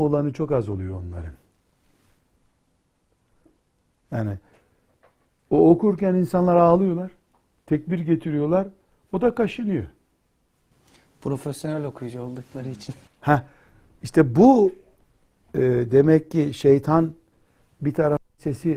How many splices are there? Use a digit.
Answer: 0